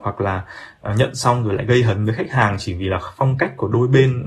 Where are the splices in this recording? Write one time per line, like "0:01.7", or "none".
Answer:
none